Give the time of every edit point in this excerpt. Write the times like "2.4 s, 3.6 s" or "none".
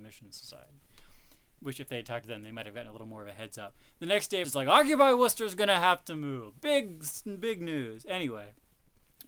4.4 s